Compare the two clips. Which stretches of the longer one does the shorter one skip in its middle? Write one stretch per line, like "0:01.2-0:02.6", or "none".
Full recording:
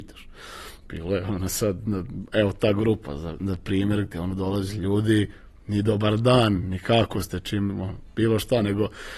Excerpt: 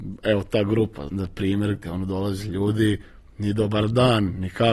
0:03.2-0:03.4